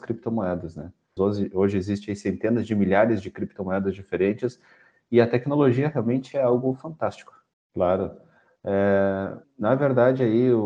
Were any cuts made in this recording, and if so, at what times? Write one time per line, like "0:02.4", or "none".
0:01.2
0:07.5
0:09.4